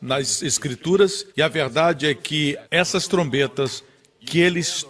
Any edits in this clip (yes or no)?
yes